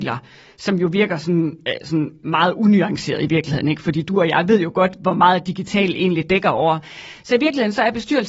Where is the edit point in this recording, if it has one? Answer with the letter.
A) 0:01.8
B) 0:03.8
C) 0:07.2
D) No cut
C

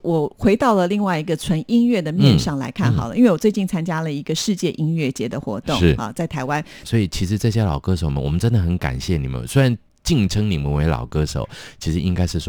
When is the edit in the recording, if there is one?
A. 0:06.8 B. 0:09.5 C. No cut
A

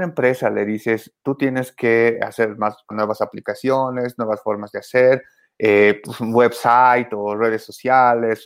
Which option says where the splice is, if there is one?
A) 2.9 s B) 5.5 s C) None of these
A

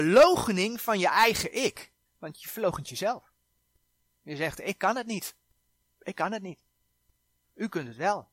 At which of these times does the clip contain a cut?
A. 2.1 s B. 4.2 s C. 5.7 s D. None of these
A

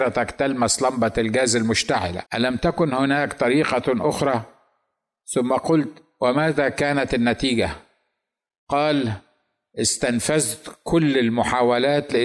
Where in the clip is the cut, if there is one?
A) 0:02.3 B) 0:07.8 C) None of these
A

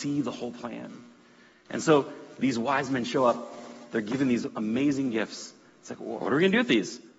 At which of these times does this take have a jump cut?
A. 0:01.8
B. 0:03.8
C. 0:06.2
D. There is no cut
C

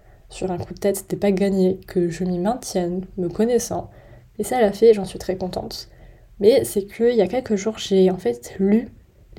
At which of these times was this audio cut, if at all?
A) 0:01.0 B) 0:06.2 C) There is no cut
C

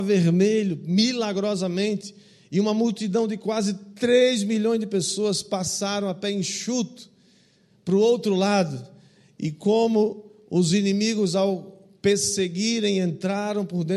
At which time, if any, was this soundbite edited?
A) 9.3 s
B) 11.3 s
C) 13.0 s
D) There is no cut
D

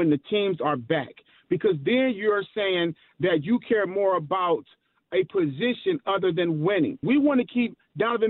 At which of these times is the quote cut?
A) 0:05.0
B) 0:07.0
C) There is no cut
B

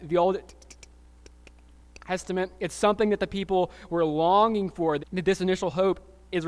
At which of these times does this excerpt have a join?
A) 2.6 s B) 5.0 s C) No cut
B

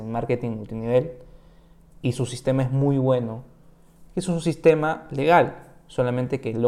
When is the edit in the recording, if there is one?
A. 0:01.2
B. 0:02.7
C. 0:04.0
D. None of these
C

